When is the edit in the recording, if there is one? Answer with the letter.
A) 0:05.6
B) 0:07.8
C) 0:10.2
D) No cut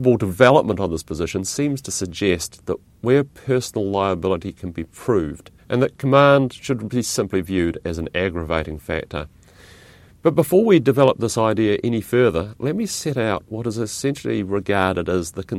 A